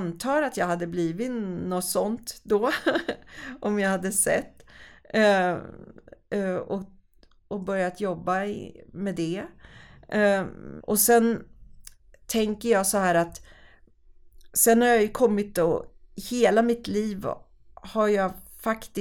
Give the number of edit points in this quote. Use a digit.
1